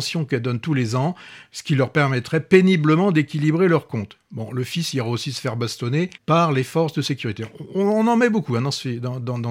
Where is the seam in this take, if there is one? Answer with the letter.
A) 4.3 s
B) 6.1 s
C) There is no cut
B